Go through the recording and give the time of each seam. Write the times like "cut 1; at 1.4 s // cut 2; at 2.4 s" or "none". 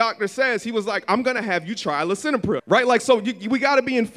cut 1; at 2.6 s